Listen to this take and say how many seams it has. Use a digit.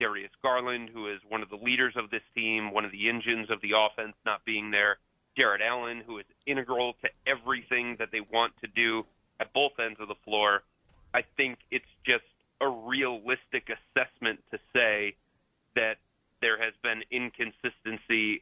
0